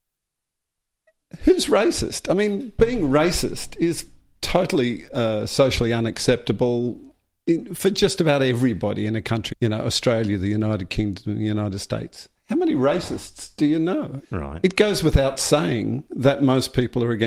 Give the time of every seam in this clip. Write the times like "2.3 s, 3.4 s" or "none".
9.5 s, 14.2 s

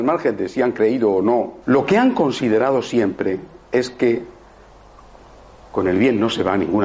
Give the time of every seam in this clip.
1.6 s

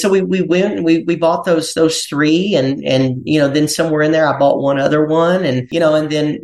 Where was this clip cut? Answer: none

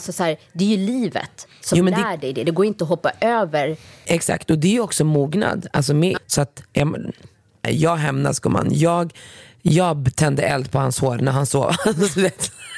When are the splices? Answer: 4.1 s, 6.2 s, 7.6 s

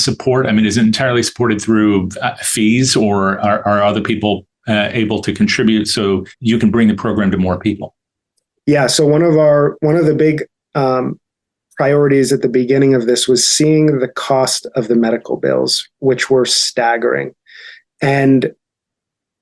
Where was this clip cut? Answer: 6.3 s

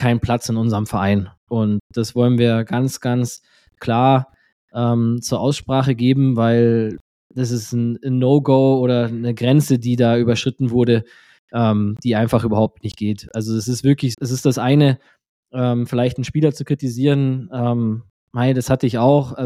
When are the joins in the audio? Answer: 14.1 s

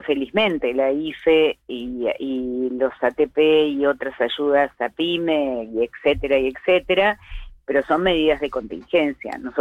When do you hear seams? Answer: none

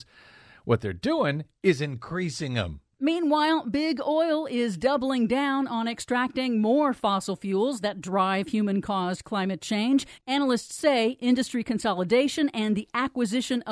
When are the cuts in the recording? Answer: 2.9 s, 10.2 s

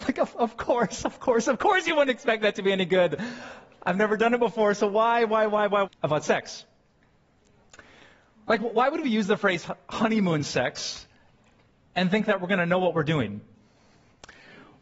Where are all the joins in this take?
5.8 s

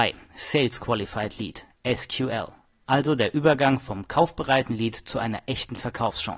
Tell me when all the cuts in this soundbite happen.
none

